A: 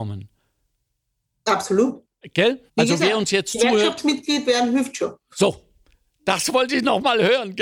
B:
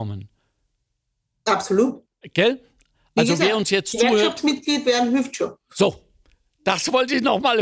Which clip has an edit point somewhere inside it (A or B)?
A